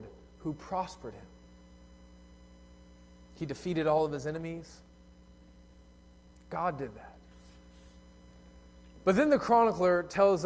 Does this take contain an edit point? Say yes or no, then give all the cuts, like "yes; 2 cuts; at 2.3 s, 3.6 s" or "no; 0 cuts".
no; 0 cuts